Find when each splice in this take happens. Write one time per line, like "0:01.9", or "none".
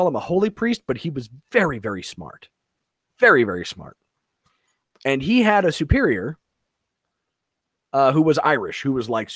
none